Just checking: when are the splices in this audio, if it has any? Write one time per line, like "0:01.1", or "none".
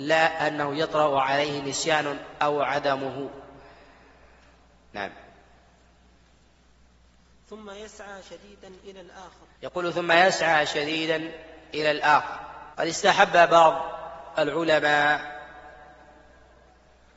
0:09.5
0:12.7